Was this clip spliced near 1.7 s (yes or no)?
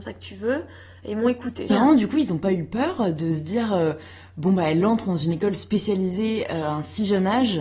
yes